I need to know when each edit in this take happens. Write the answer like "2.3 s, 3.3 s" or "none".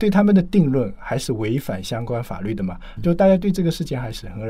3.0 s